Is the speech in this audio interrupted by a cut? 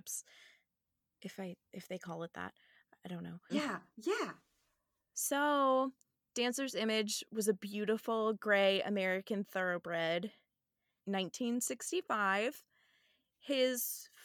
yes; 2 cuts; at 3.5 s, 11.0 s

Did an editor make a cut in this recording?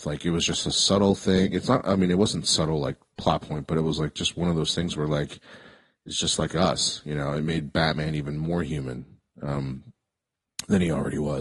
no; 0 cuts

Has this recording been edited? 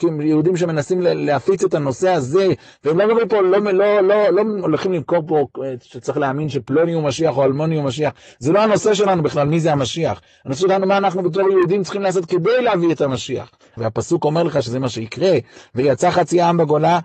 yes; 1 cut; at 13.8 s

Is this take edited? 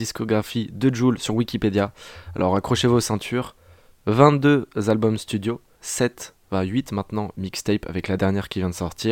no; 0 cuts

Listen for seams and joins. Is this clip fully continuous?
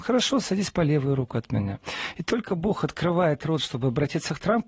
yes; 0 cuts

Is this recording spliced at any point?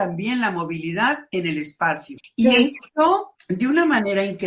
yes; 1 cut; at 2.2 s

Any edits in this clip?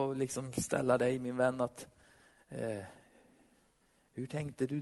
no; 0 cuts

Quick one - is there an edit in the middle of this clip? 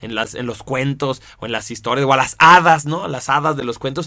no; 0 cuts

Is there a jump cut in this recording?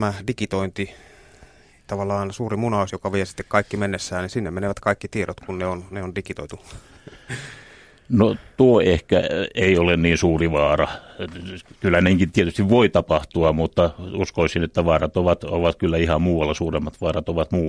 yes; 1 cut; at 2.9 s

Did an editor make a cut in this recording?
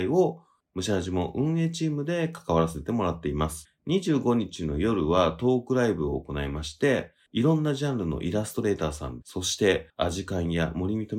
yes; 1 cut; at 9.2 s

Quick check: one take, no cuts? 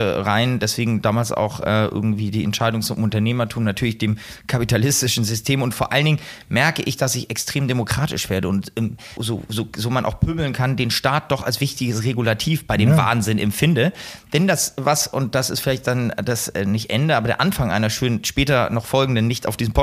no; 1 cut; at 9.2 s

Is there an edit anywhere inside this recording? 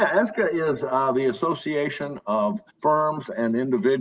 yes; 1 cut; at 2.7 s

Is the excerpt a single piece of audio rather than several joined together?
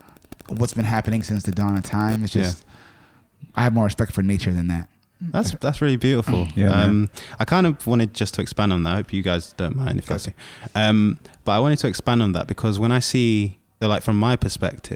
no; 2 cuts; at 10.2 s, 13.8 s

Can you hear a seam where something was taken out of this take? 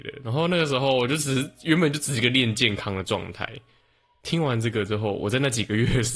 no; 0 cuts

